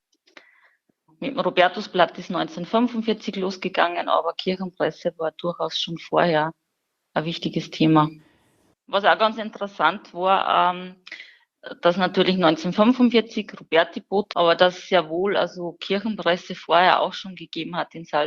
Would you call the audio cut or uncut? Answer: cut